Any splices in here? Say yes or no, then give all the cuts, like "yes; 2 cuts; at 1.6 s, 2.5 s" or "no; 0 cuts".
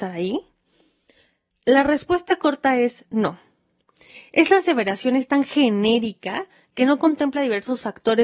yes; 1 cut; at 1.5 s